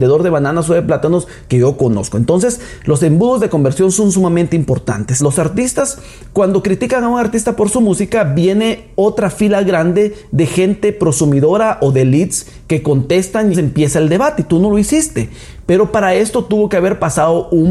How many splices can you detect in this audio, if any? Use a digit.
2